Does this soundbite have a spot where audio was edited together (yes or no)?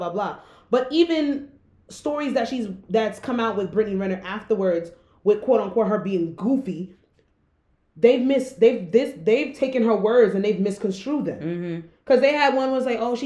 no